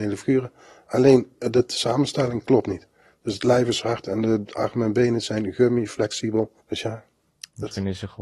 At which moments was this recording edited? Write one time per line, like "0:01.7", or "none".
0:06.6